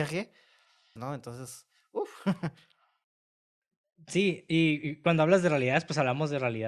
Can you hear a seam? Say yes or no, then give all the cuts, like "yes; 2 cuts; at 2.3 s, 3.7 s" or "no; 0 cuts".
yes; 1 cut; at 1.0 s